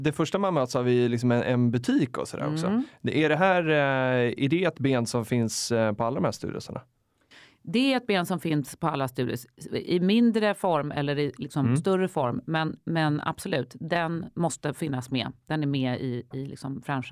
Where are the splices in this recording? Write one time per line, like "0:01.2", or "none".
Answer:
none